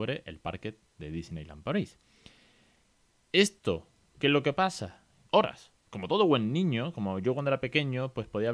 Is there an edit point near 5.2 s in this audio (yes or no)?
yes